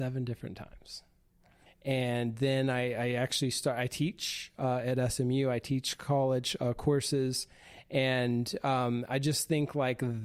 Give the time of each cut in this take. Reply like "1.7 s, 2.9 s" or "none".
1.7 s